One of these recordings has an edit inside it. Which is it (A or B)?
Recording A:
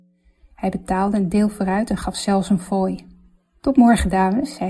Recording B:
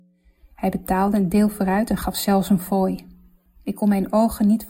B